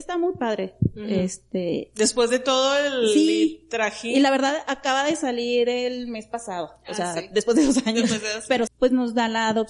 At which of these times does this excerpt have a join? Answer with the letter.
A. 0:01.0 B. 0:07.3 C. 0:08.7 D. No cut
C